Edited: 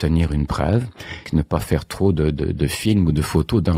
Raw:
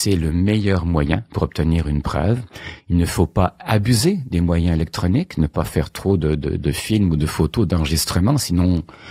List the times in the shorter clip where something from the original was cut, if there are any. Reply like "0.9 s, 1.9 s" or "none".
1.2 s